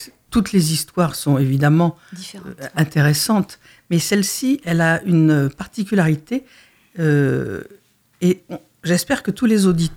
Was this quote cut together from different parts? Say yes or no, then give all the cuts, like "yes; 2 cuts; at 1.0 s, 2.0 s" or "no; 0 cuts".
no; 0 cuts